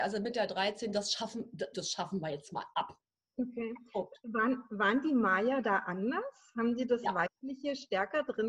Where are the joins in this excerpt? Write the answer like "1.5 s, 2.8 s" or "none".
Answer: 1.7 s